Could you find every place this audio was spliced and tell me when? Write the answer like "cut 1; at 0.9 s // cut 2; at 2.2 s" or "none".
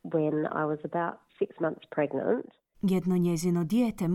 cut 1; at 1.3 s // cut 2; at 2.7 s